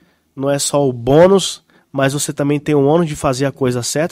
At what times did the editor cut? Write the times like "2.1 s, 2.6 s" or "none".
none